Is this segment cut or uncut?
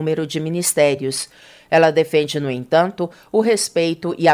uncut